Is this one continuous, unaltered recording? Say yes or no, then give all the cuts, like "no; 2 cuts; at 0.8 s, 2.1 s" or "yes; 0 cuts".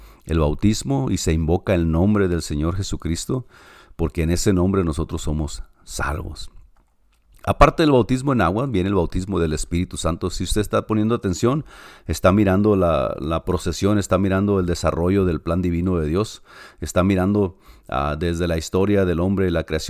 yes; 0 cuts